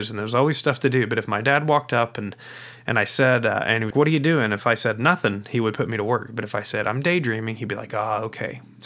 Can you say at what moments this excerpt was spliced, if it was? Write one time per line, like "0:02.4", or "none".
0:03.9